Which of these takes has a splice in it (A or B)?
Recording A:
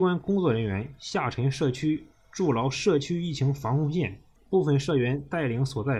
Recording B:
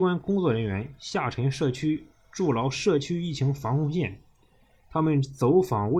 A